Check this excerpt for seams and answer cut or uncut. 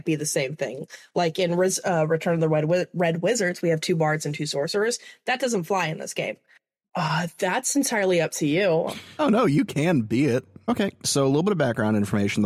cut